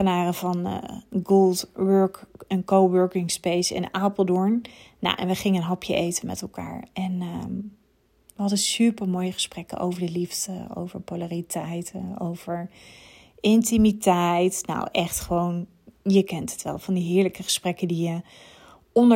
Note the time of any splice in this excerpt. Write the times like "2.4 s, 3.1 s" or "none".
none